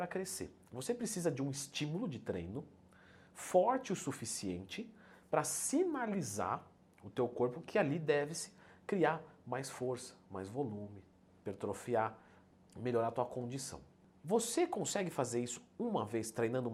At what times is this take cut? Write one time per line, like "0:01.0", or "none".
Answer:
none